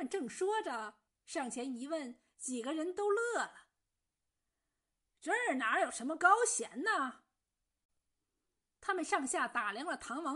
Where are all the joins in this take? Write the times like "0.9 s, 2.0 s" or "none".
1.1 s